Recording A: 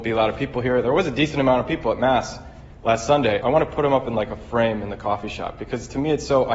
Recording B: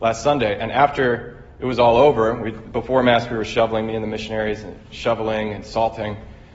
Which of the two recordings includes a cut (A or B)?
A